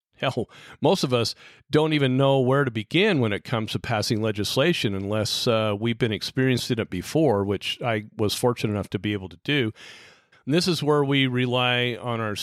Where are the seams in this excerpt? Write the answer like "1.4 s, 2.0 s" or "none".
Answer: 10.3 s